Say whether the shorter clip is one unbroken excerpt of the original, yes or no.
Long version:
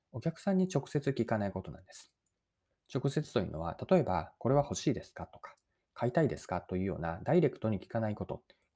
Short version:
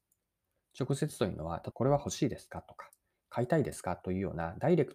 no